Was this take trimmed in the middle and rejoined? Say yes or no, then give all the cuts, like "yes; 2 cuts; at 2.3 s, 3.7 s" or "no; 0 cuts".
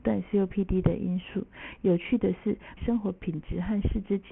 yes; 1 cut; at 2.8 s